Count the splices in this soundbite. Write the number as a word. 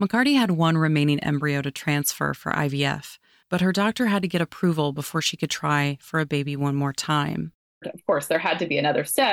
zero